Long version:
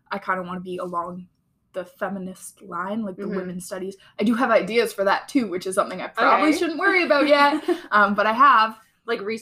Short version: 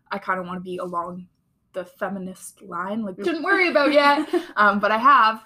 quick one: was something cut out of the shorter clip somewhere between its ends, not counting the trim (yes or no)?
yes